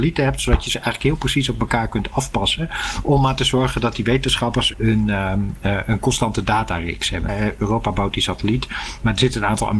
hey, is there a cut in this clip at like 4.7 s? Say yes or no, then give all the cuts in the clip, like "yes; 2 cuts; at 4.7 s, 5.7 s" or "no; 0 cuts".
yes; 2 cuts; at 4.7 s, 7.3 s